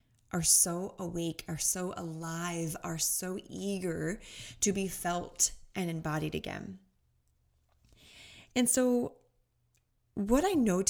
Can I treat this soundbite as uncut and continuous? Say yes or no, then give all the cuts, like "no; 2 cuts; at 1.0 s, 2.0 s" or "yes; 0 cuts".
yes; 0 cuts